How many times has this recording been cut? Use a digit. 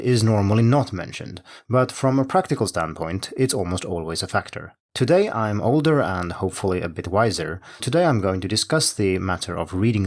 2